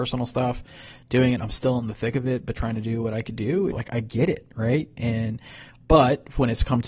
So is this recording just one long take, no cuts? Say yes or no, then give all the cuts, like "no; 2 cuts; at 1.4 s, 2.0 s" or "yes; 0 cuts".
no; 1 cut; at 3.7 s